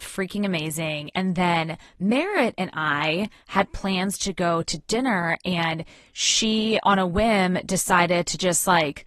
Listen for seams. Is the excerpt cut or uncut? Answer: uncut